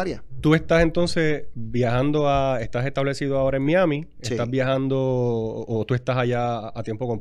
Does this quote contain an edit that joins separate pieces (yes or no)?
no